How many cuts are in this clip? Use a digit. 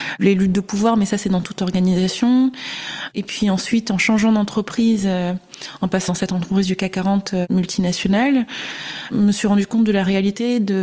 1